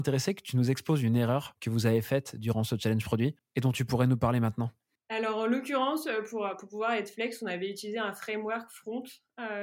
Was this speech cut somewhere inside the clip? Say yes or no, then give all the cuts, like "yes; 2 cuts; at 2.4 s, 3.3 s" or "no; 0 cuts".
no; 0 cuts